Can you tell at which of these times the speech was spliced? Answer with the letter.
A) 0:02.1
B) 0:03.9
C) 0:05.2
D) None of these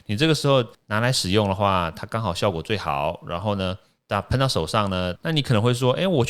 C